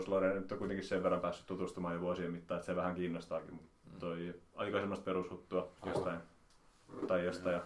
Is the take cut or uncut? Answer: cut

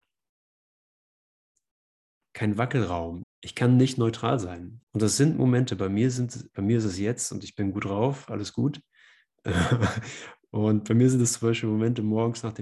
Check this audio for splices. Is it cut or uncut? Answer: cut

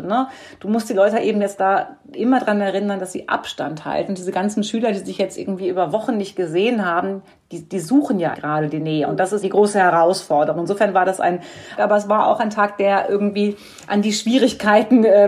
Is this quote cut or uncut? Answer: cut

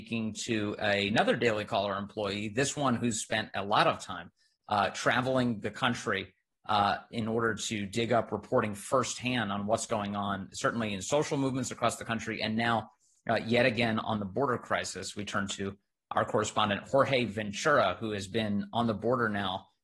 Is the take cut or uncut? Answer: uncut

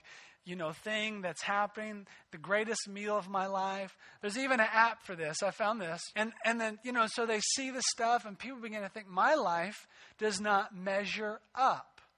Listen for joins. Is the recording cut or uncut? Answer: cut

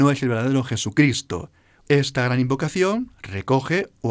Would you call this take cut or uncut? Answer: cut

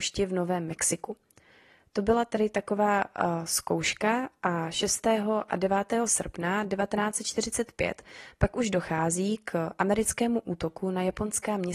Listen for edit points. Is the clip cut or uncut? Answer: uncut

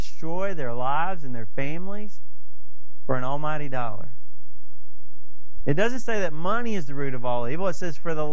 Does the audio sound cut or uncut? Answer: cut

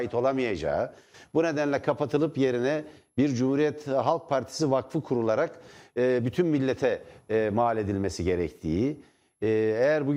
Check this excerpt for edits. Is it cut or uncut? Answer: uncut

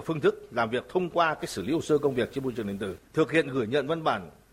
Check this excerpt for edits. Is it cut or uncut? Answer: cut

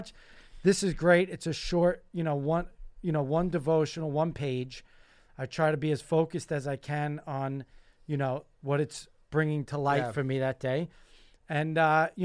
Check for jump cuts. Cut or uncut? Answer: uncut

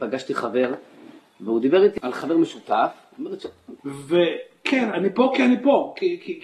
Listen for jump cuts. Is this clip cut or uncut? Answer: cut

